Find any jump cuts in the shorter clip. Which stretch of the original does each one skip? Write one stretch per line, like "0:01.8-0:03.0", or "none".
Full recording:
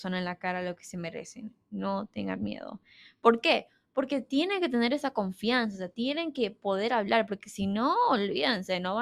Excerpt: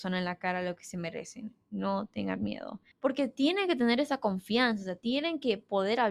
0:02.9-0:03.8